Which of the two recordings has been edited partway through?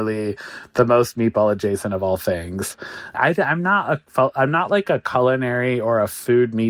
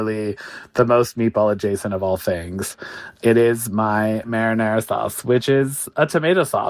first; 1 cut; at 3.1 s

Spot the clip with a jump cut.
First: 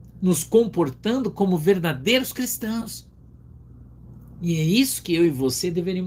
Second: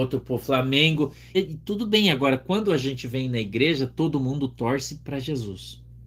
second; 1 cut; at 1.3 s

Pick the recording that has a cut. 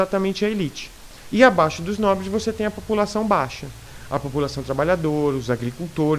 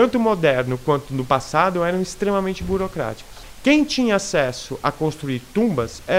first; 1 cut; at 1.3 s

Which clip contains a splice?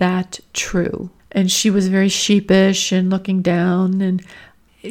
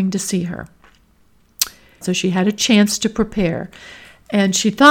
second; 1 cut; at 2.0 s

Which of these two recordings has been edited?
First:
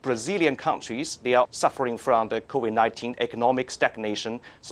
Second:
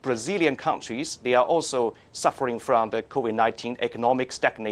first; 1 cut; at 1.4 s

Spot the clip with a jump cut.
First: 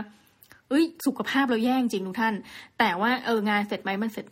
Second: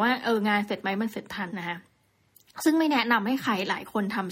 second; 1 cut; at 1.5 s

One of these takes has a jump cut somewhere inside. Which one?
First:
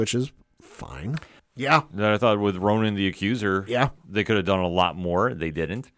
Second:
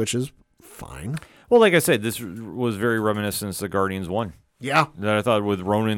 first; 1 cut; at 1.4 s

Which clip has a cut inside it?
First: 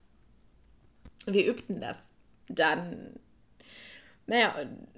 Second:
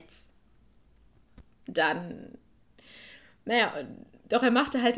second; 1 cut; at 1.4 s

